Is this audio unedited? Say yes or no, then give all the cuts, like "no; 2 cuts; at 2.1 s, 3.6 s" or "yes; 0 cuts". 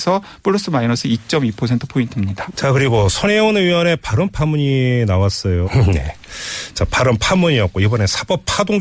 no; 2 cuts; at 2.5 s, 5.6 s